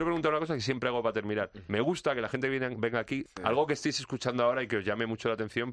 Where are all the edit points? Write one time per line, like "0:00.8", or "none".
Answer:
0:03.3